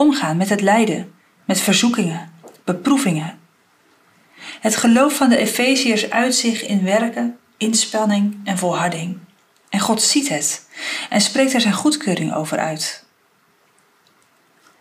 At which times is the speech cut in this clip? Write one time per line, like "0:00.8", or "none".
none